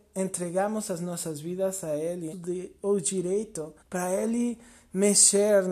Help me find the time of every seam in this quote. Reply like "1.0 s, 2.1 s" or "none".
2.3 s, 3.8 s